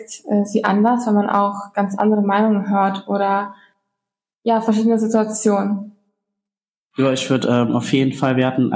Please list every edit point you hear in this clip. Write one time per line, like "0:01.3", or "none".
none